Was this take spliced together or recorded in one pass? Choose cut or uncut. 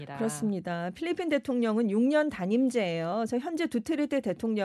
uncut